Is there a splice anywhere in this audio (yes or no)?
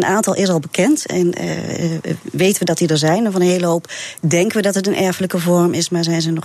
no